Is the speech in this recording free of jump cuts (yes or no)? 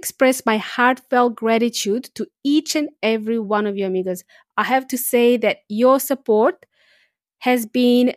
yes